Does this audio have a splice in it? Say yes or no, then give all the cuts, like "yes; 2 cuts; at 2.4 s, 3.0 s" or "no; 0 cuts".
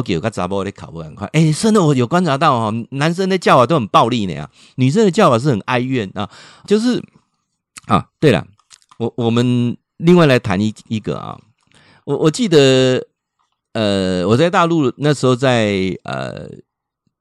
yes; 1 cut; at 6.6 s